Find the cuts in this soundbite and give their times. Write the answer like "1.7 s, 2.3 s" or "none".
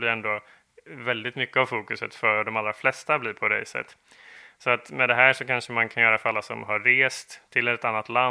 none

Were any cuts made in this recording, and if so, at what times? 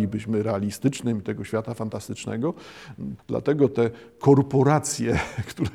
3.2 s

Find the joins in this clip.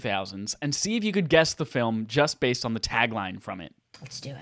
none

